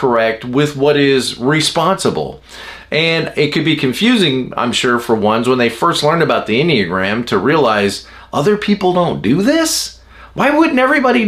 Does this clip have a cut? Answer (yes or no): no